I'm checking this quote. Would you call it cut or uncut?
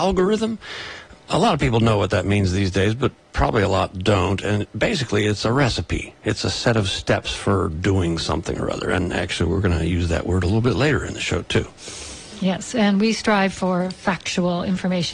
uncut